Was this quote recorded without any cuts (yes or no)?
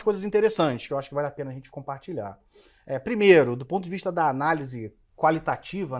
yes